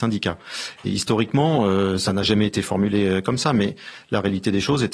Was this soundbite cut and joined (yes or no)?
no